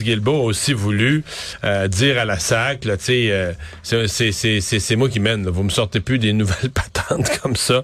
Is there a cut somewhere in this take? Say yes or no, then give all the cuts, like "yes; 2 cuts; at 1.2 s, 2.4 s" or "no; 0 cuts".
no; 0 cuts